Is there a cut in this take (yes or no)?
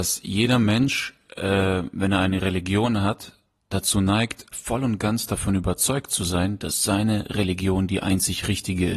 yes